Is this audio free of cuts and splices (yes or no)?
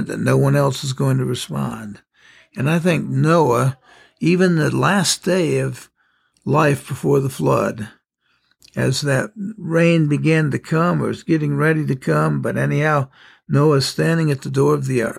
yes